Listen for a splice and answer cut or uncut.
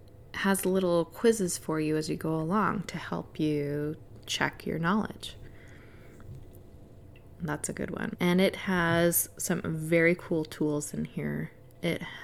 cut